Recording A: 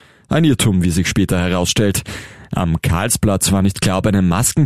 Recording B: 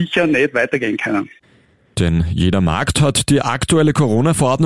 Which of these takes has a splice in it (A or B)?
B